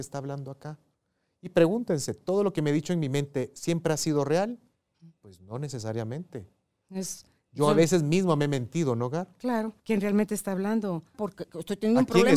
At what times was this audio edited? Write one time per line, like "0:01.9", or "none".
0:09.8
0:11.1